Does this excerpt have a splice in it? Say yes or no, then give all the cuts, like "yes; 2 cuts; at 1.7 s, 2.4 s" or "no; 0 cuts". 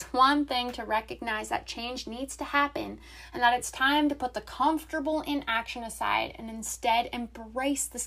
no; 0 cuts